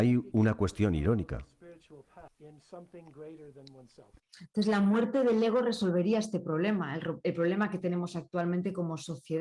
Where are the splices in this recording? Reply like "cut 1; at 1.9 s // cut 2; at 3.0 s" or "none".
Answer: cut 1; at 2.3 s